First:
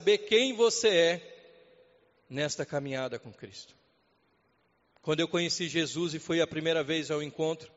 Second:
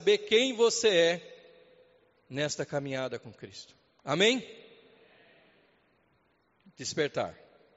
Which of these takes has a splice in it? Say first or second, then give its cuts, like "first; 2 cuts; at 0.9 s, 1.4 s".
second; 1 cut; at 4.0 s